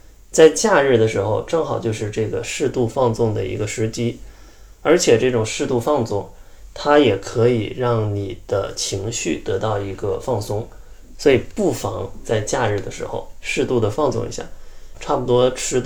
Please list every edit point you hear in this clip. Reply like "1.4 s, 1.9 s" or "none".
11.1 s, 14.9 s